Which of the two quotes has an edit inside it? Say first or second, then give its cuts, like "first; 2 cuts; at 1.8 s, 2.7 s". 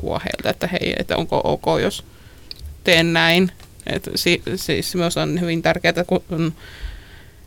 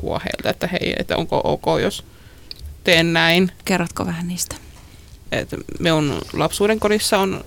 second; 2 cuts; at 3.6 s, 5.3 s